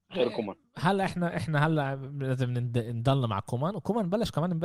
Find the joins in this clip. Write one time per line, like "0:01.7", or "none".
none

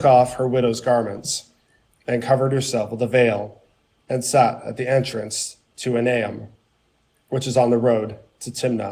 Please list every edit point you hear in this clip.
0:04.0

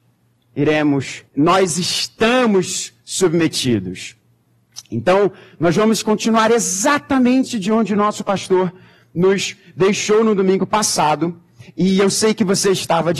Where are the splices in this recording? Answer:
0:01.3

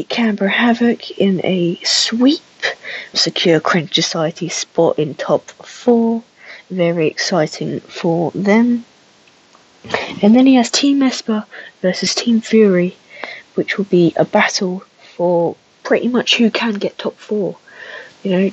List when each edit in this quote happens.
0:03.1

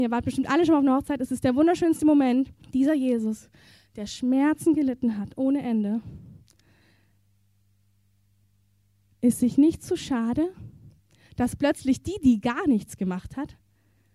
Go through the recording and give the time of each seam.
0:02.6

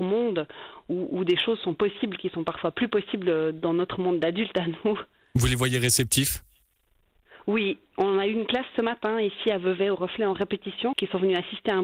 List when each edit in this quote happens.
0:10.9

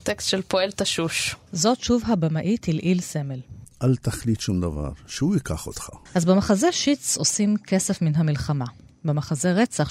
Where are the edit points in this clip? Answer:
0:03.6
0:06.1

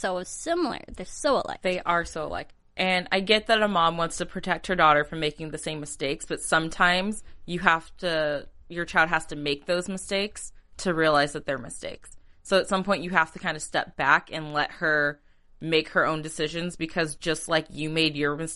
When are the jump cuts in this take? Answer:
none

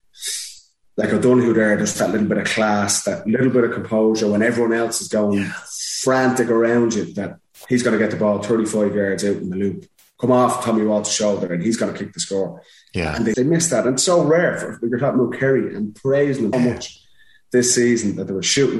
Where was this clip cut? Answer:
0:13.3
0:16.5

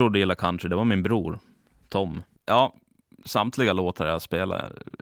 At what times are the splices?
0:02.4

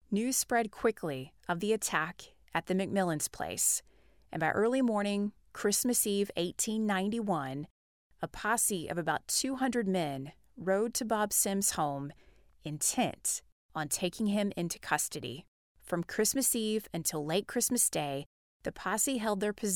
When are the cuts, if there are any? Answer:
0:15.7

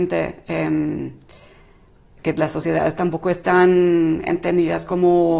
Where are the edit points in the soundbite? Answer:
0:02.2

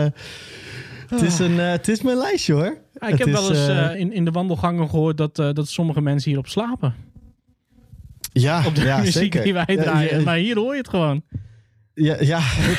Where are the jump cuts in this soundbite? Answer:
0:03.9

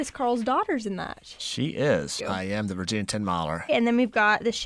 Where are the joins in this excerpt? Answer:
0:02.2
0:03.7

